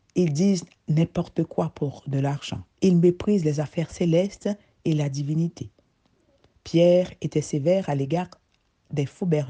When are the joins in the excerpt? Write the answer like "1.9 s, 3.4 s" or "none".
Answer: 2.7 s, 6.5 s